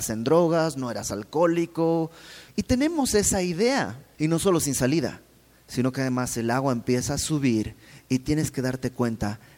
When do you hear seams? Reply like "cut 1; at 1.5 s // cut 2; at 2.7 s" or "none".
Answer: cut 1; at 2.5 s // cut 2; at 4.1 s